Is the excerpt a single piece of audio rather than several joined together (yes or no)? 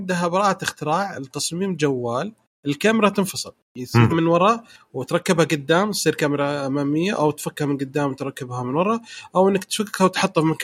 no